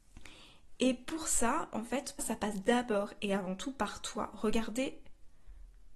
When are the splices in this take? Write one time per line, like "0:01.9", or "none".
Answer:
0:02.2

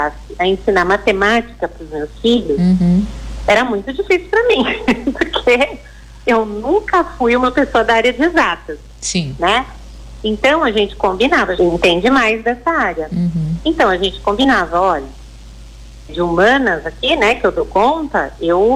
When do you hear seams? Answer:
0:11.6
0:16.1

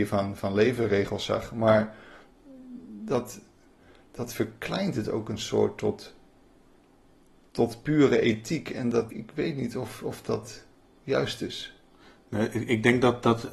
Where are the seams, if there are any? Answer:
0:09.1

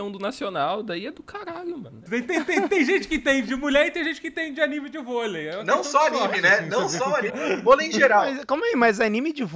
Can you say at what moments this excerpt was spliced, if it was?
0:02.1
0:07.3

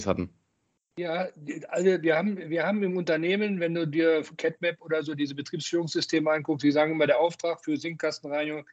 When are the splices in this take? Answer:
none

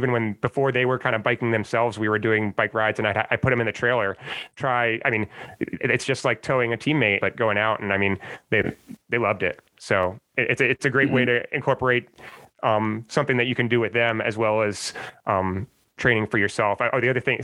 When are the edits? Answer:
0:07.2

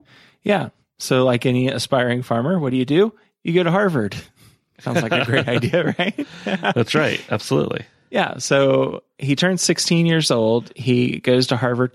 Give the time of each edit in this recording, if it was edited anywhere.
none

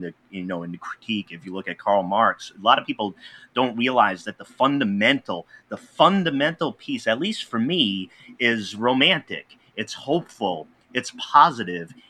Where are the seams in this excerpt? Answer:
none

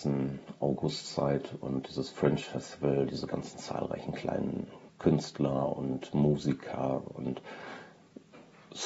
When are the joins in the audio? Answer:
0:04.9

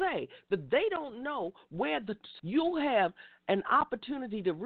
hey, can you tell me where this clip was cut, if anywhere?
0:02.4

